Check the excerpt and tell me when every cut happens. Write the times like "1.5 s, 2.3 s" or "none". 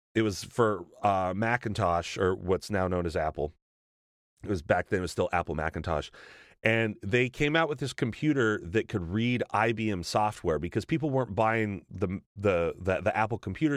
none